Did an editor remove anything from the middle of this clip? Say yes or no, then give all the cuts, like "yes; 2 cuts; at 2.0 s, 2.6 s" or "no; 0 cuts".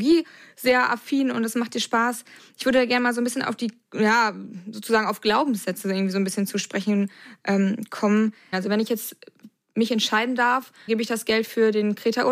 yes; 2 cuts; at 8.5 s, 10.9 s